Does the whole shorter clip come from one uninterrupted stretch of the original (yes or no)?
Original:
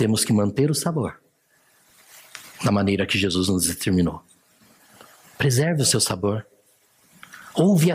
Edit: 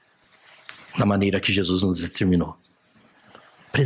yes